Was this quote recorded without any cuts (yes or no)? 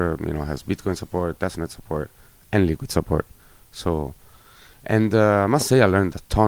yes